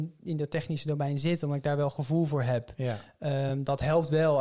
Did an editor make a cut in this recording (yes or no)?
no